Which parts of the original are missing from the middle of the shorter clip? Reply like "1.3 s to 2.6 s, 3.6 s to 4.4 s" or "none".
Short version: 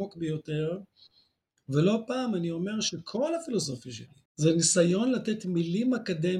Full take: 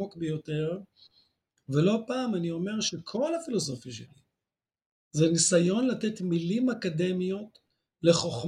4.3 s to 5.0 s